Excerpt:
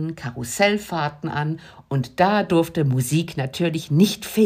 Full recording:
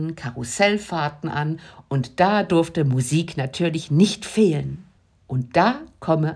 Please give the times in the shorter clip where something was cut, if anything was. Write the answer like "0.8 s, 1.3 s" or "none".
none

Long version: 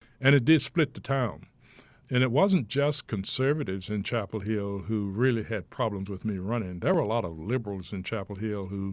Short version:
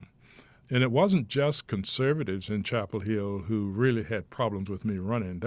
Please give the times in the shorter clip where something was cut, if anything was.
none

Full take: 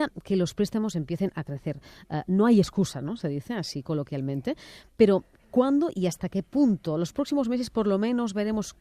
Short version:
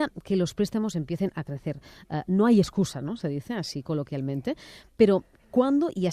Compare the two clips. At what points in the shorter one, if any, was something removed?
none

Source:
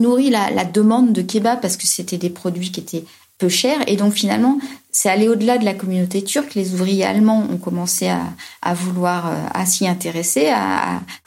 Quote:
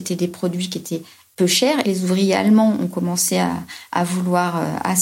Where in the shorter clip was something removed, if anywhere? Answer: 1.8 s

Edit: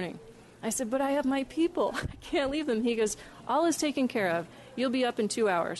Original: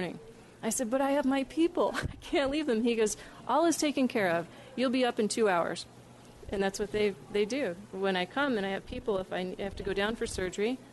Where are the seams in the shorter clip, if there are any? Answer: none

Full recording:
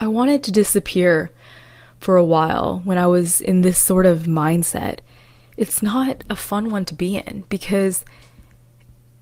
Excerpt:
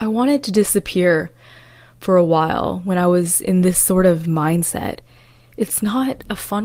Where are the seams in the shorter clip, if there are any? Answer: none

